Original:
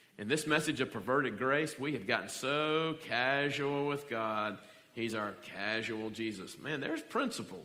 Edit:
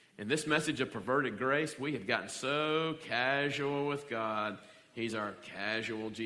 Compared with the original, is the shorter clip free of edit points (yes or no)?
yes